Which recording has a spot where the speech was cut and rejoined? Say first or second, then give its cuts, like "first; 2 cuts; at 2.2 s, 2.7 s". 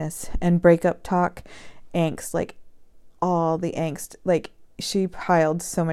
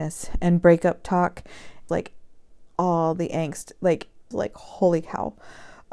second; 2 cuts; at 1.9 s, 4.3 s